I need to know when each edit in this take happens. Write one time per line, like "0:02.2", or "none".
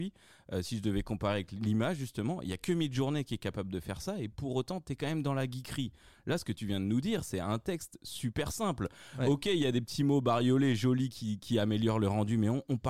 none